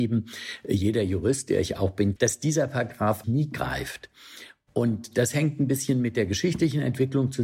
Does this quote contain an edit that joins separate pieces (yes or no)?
yes